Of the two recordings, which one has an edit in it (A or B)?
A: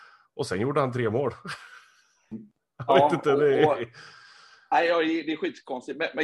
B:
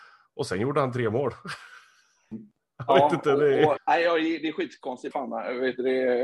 B